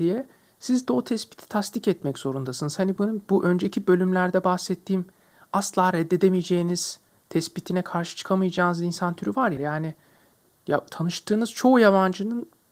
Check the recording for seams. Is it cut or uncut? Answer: cut